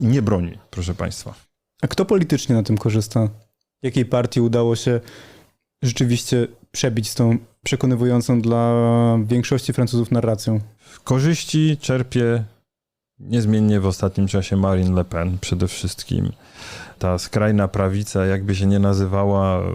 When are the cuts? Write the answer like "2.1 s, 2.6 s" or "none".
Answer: none

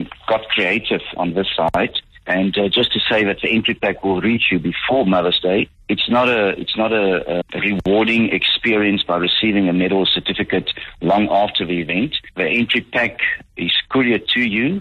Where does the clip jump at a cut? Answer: 1.2 s, 7.4 s

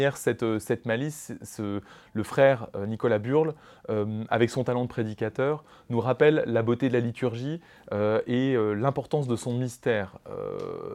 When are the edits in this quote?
none

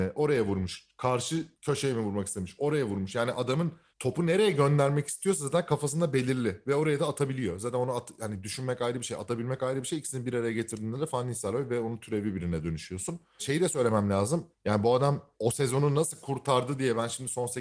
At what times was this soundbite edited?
none

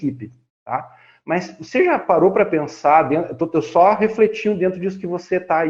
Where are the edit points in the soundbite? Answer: none

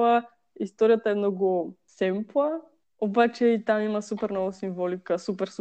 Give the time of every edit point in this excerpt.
none

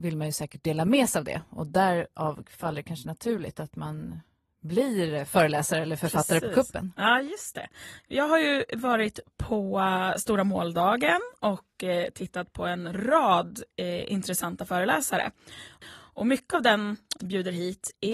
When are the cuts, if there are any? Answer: 8.0 s, 15.8 s, 17.2 s

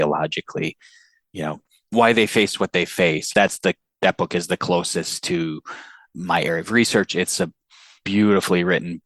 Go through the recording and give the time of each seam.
3.3 s

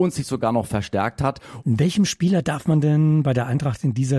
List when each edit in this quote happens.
1.6 s

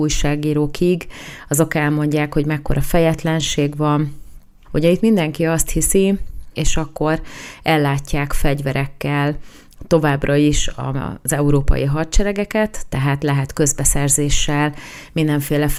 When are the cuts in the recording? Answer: 4.6 s, 6.5 s

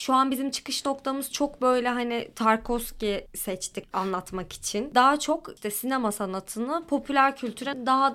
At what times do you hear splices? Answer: 4.9 s

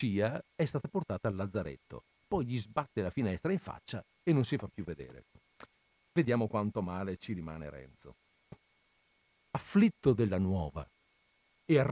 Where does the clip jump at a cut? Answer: 6.0 s

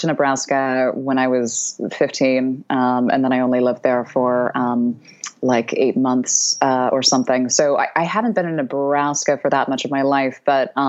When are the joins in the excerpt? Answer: none

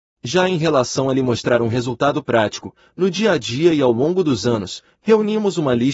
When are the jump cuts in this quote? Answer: none

